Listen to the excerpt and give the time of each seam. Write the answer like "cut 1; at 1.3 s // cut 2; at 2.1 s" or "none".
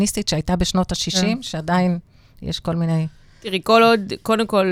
none